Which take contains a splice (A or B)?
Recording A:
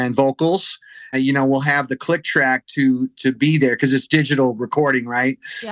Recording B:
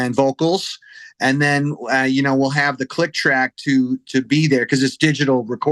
A